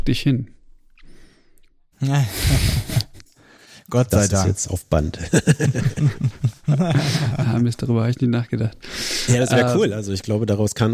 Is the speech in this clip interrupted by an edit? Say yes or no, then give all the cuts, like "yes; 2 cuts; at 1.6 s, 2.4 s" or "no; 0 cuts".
no; 0 cuts